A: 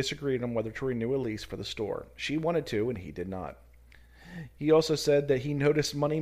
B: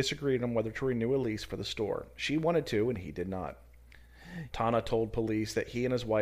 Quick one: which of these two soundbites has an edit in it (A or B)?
B